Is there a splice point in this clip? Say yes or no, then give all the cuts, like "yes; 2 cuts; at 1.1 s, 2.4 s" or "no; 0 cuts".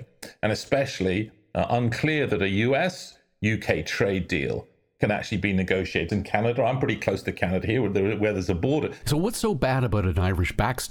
yes; 2 cuts; at 6.1 s, 9.0 s